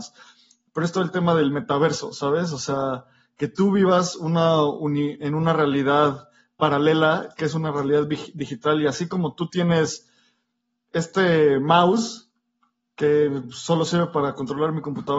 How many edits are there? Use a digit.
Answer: 0